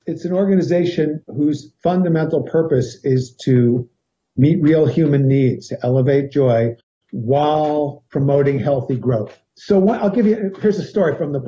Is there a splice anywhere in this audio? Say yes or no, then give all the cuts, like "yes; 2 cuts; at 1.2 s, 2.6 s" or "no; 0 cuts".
yes; 1 cut; at 5.7 s